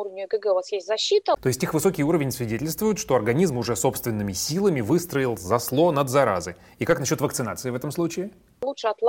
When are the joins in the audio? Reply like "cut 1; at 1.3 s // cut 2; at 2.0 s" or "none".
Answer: cut 1; at 1.4 s